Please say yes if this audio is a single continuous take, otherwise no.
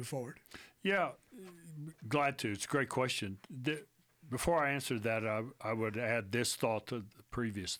yes